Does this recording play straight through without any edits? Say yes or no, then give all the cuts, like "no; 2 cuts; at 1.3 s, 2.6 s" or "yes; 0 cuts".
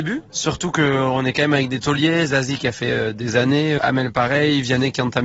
yes; 0 cuts